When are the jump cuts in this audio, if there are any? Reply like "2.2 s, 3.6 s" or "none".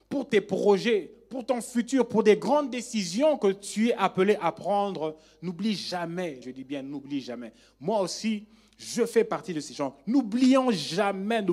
6.4 s